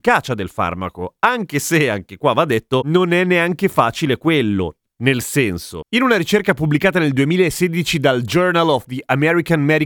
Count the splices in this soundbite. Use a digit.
0